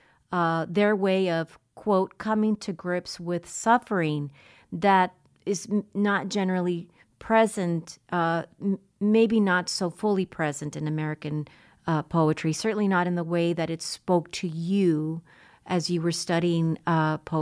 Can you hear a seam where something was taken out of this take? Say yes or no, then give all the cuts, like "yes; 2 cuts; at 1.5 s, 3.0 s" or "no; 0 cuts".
no; 0 cuts